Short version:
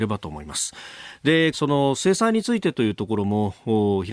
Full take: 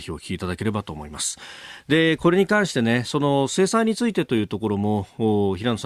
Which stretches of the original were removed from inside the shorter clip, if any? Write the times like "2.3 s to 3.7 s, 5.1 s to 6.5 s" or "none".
2.2 s to 3.0 s